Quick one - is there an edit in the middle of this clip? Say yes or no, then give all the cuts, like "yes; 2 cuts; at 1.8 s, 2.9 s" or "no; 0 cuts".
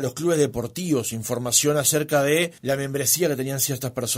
yes; 1 cut; at 2.6 s